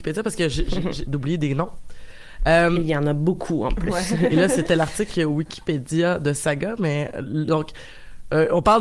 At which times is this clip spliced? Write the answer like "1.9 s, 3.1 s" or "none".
1.1 s